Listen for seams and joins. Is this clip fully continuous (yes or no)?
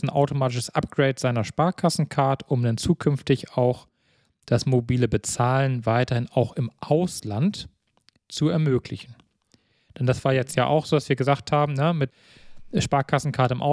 yes